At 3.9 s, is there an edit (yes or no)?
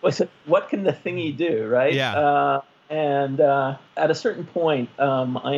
yes